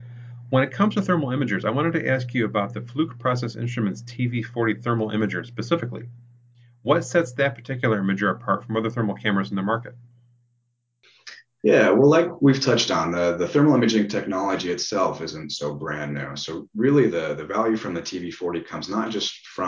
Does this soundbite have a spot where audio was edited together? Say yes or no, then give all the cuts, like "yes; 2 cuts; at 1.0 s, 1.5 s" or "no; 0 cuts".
no; 0 cuts